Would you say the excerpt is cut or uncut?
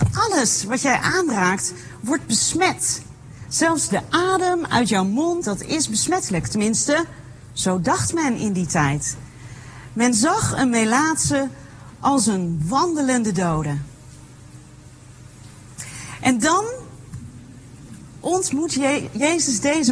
cut